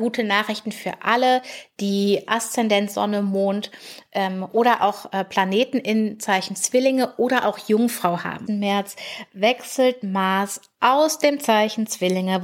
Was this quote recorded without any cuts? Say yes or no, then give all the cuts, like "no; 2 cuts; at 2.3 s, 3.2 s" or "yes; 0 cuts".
no; 1 cut; at 8.5 s